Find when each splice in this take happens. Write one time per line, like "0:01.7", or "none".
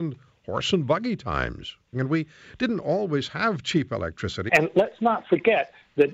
0:01.9
0:04.5